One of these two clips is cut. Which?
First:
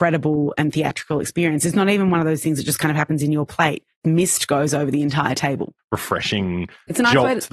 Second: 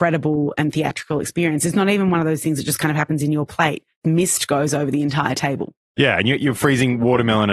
first; 1 cut; at 5.8 s

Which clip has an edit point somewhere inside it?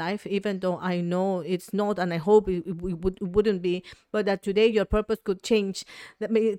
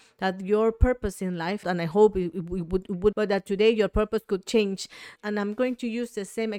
second; 3 cuts; at 1.6 s, 3.1 s, 5.2 s

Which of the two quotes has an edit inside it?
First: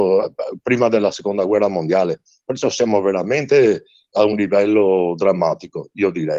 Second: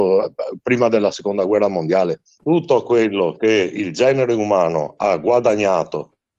second; 1 cut; at 2.4 s

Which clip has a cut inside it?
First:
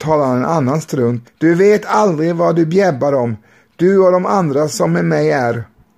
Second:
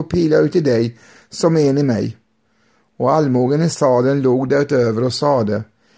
first; 1 cut; at 1.2 s

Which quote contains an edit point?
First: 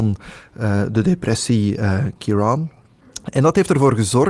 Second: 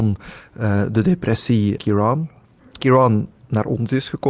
second; 2 cuts; at 1.8 s, 2.8 s

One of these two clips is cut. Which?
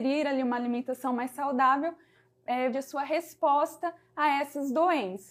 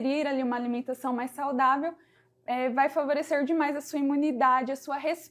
first; 1 cut; at 2.7 s

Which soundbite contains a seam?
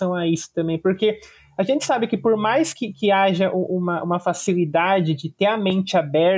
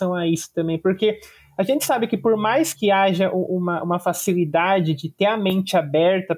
second; 1 cut; at 2.7 s

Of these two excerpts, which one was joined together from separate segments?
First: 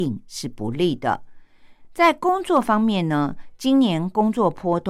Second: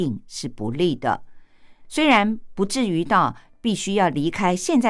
second; 1 cut; at 1.8 s

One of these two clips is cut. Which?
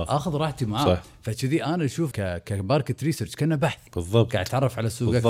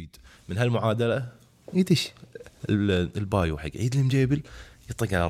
first; 2 cuts; at 2.1 s, 3.9 s

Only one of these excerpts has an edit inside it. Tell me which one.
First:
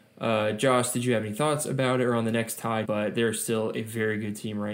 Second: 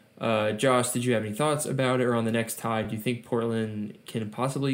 first; 1 cut; at 2.8 s

